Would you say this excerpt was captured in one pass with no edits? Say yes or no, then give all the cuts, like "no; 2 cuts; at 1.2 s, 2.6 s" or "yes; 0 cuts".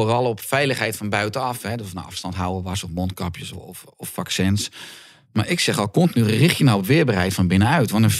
no; 1 cut; at 3.5 s